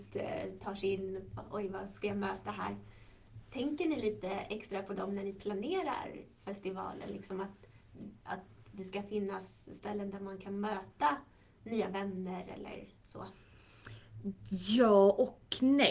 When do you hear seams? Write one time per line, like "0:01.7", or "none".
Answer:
none